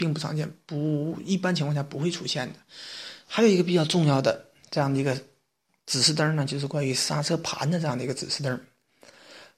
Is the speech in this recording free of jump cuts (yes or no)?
yes